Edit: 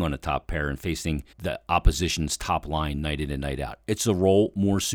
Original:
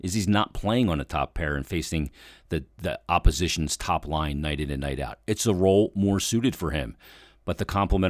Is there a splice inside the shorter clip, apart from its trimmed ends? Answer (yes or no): yes